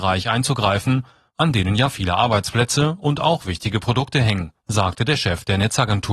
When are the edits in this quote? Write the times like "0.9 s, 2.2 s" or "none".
1.3 s, 4.6 s

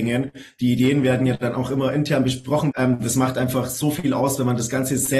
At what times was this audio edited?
2.7 s

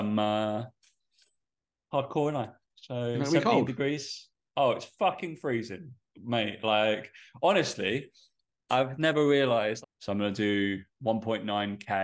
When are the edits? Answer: 9.8 s

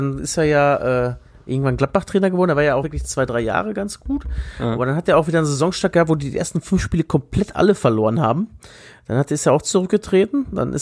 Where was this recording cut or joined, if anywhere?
none

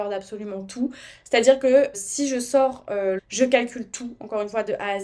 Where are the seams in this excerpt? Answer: 1.9 s, 3.2 s

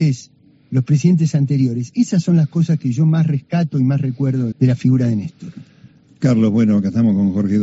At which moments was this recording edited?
4.5 s

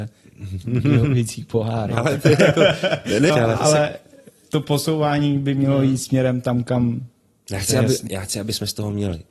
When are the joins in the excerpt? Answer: 3.3 s

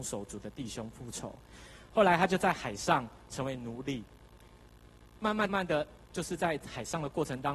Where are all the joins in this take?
5.5 s

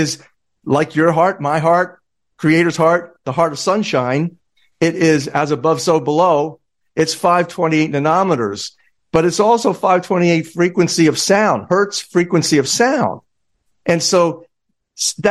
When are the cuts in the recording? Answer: none

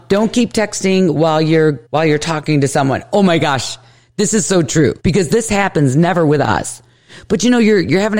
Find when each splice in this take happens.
1.9 s, 5.0 s

